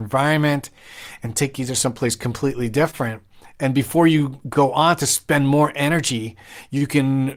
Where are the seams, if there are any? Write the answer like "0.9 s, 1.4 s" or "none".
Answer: none